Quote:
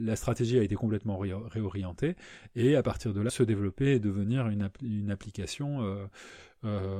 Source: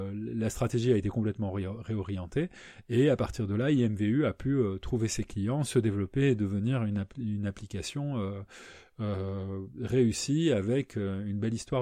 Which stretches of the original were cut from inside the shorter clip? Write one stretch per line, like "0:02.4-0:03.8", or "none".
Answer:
0:03.6-0:05.6